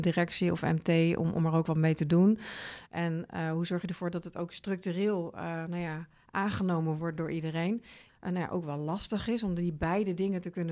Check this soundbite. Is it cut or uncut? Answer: cut